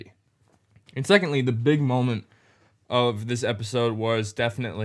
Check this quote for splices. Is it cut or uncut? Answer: uncut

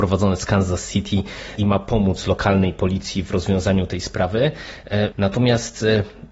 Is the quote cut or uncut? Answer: cut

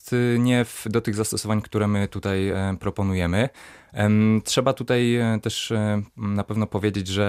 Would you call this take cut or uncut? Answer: uncut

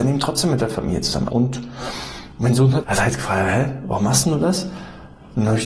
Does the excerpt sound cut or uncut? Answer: cut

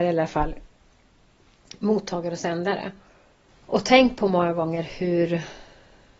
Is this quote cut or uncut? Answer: cut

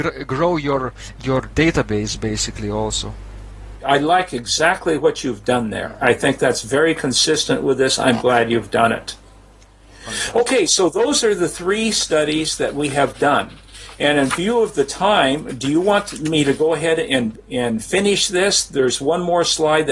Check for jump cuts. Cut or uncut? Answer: uncut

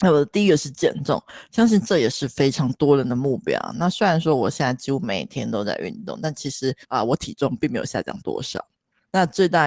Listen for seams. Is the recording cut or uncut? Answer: cut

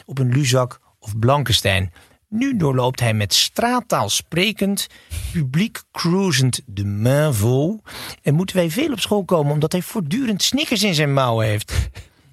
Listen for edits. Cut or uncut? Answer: uncut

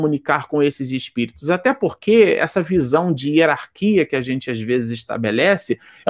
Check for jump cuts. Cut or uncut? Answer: uncut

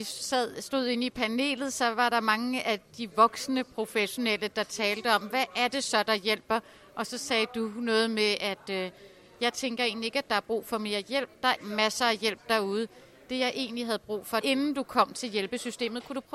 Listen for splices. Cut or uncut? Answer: cut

